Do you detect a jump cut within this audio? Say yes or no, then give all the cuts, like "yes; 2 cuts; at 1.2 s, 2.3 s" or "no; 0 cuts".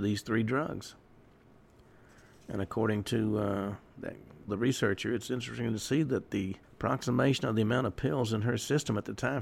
yes; 2 cuts; at 4.5 s, 6.6 s